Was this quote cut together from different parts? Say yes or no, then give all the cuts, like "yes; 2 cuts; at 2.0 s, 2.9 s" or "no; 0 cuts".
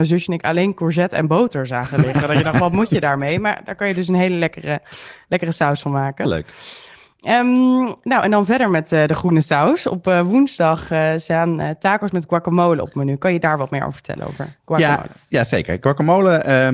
no; 0 cuts